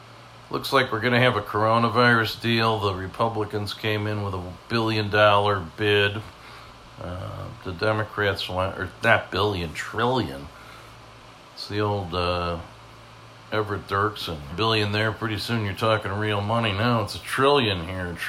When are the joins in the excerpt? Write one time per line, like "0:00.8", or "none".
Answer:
0:14.5

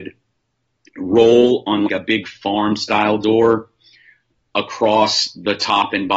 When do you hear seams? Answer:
0:01.9

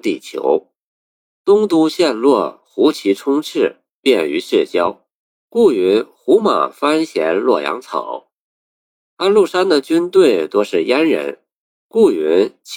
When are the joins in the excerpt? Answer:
0:09.0

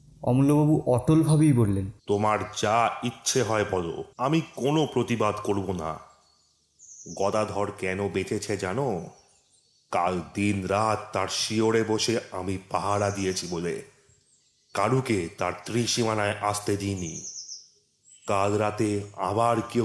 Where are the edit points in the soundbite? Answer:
0:02.0
0:04.1

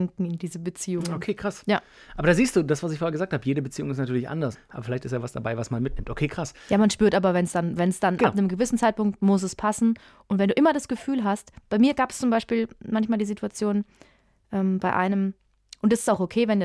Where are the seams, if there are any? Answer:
0:04.6

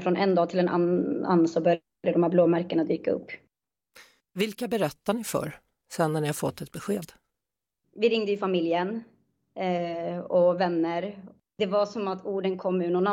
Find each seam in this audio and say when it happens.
none

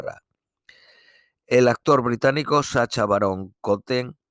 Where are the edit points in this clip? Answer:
none

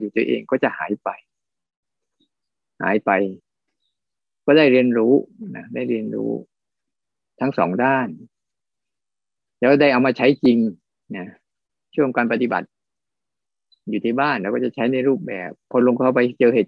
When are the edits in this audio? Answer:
none

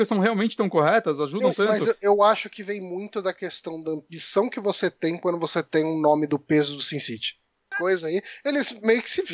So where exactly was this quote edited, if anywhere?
0:07.7

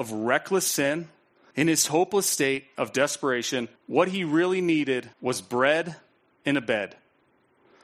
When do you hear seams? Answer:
0:01.5
0:03.8
0:05.1

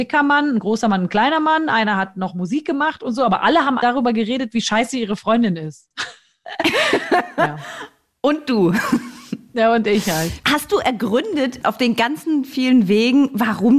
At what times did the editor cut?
0:03.8

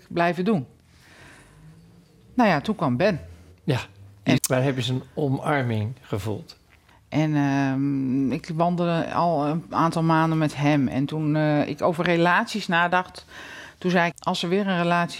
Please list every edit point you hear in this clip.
0:04.4
0:06.9
0:14.1

